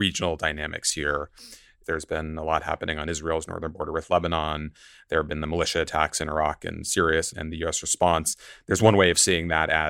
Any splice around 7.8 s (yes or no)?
no